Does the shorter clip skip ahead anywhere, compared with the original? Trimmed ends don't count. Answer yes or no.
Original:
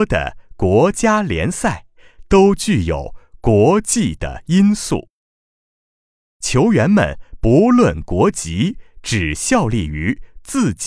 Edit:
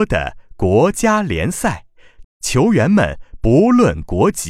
yes